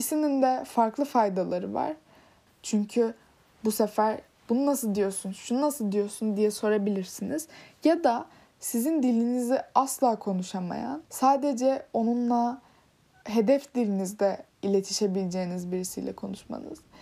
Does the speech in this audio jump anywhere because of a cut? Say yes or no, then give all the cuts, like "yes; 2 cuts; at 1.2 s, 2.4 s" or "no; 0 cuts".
yes; 2 cuts; at 2.5 s, 11.0 s